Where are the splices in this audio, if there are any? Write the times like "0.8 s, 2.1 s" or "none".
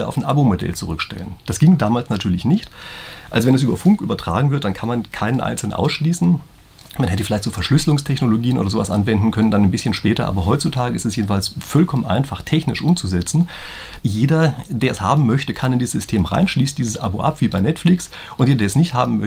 14.0 s